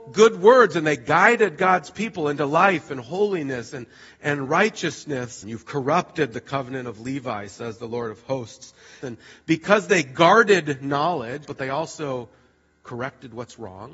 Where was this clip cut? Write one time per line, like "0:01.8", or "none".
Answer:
0:05.4
0:09.0
0:11.4